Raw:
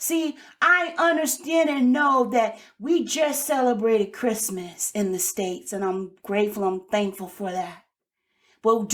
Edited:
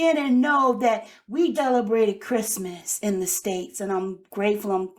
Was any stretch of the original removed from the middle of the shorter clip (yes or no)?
yes